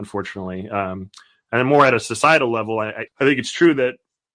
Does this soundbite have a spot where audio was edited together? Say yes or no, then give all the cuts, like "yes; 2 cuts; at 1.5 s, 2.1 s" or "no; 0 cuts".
yes; 1 cut; at 3.1 s